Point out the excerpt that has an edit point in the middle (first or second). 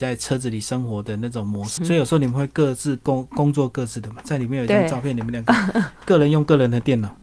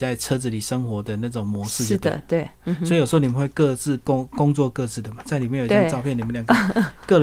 first